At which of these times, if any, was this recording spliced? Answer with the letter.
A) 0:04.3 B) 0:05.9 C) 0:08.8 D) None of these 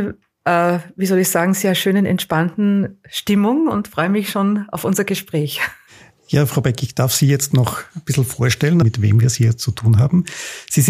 C